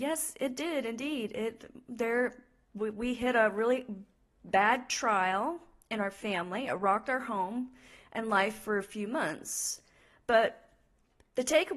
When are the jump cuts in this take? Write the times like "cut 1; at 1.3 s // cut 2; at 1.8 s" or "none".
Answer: none

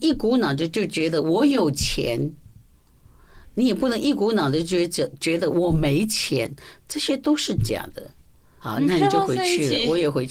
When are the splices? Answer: cut 1; at 8.6 s

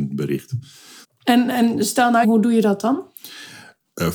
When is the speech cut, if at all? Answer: cut 1; at 1.0 s // cut 2; at 2.2 s

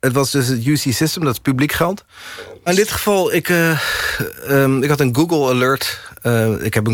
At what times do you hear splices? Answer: cut 1; at 2.7 s

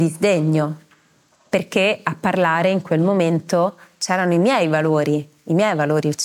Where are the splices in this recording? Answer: none

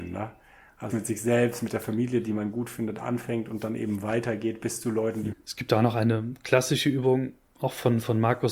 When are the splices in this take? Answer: cut 1; at 0.9 s // cut 2; at 5.3 s

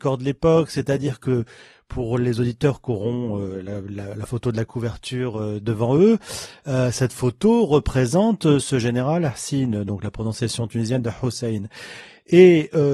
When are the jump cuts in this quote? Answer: none

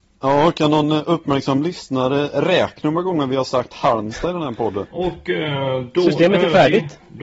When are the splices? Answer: cut 1; at 4.9 s

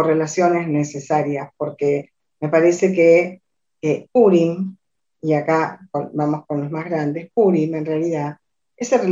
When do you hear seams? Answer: none

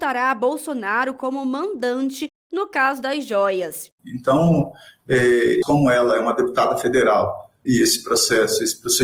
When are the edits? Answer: cut 1; at 4.0 s // cut 2; at 5.6 s // cut 3; at 7.7 s

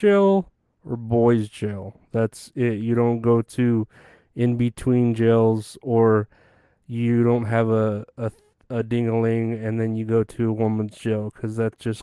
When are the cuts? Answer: none

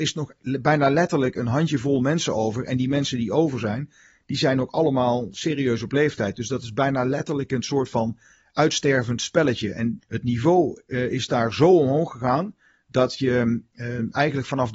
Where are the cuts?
cut 1; at 10.0 s

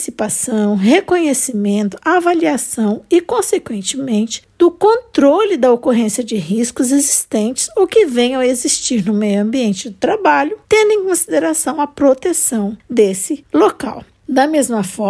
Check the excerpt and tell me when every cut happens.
none

